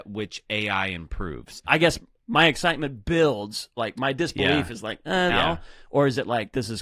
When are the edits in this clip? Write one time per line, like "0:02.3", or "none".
0:01.6
0:03.8
0:05.3